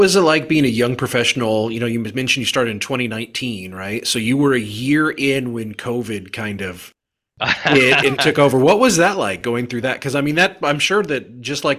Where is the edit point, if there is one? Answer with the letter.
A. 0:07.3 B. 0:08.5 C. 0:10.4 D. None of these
D